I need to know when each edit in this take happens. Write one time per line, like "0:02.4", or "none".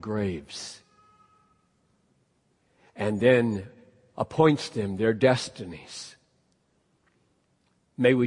none